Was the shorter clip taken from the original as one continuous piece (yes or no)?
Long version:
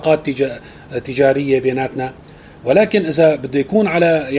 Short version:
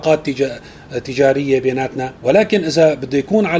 no